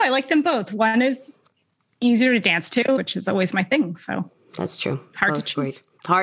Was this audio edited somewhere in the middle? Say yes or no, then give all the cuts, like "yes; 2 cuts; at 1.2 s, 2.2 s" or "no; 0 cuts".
yes; 1 cut; at 3.0 s